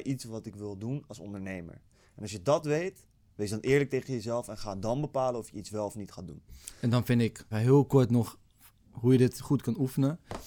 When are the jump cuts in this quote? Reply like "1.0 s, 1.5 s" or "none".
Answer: 7.5 s